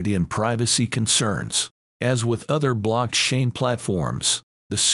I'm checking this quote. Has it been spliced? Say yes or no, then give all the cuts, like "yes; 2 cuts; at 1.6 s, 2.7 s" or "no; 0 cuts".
yes; 1 cut; at 1.9 s